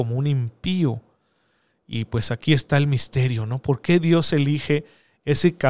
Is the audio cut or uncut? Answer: uncut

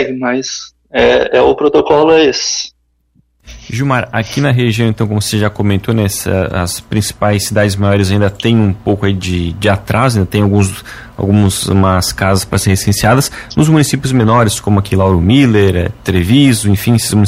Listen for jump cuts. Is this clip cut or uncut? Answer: uncut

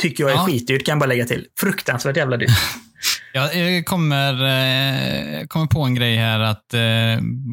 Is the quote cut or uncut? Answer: uncut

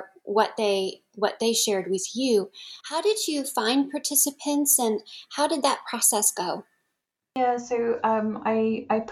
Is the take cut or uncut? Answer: uncut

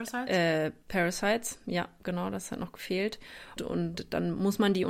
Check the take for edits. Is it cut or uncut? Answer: cut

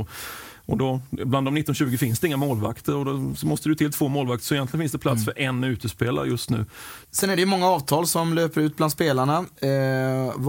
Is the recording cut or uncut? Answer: cut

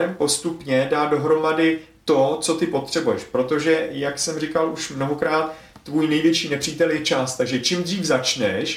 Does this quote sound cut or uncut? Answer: uncut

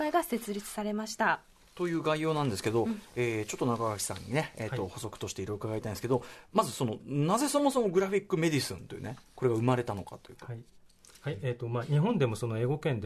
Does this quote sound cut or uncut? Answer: uncut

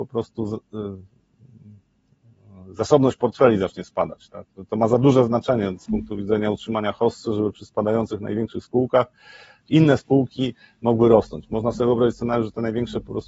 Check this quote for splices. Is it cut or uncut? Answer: uncut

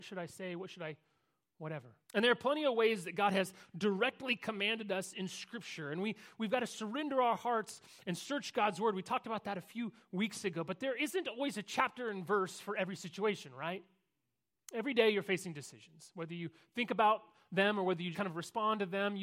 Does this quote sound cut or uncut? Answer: cut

